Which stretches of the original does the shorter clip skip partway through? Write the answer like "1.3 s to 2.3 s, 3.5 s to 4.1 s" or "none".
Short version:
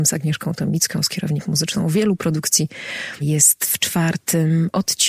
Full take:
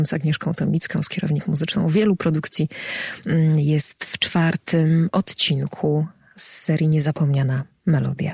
3.2 s to 3.6 s